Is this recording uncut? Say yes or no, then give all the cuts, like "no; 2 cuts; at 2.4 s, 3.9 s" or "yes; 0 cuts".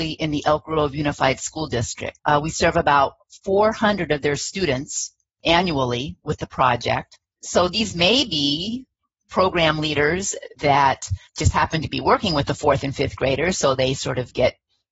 no; 2 cuts; at 2.2 s, 11.3 s